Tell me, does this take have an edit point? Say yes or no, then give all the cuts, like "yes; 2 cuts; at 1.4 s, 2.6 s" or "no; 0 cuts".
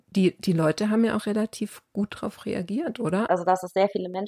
yes; 1 cut; at 3.3 s